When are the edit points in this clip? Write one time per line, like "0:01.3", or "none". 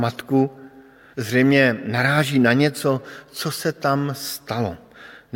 0:01.1